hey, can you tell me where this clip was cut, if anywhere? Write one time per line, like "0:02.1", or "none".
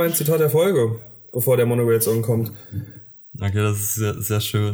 0:03.2

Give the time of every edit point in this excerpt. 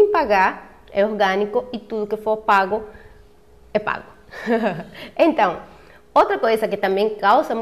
none

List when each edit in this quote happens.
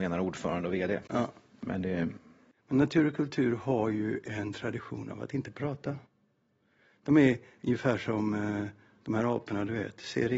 none

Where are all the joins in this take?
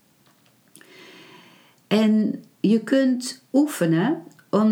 none

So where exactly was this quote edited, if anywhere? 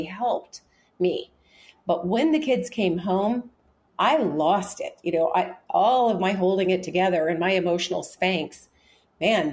none

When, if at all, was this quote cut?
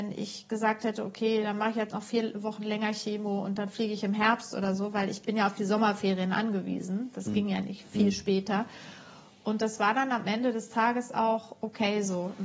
none

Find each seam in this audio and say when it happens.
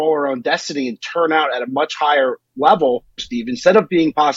0:03.2

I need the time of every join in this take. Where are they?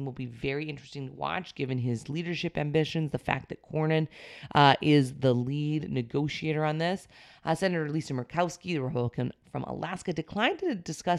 none

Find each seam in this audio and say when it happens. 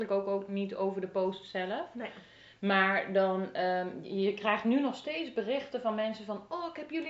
none

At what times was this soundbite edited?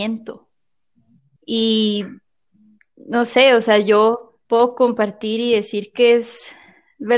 0:01.4
0:04.5

